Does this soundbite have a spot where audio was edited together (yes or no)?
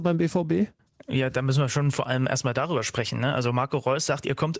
no